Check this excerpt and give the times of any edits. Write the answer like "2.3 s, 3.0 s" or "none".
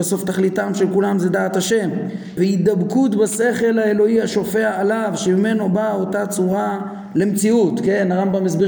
2.4 s